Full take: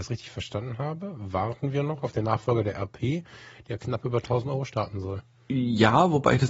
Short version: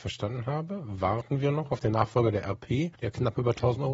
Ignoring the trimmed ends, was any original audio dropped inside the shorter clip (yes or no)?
yes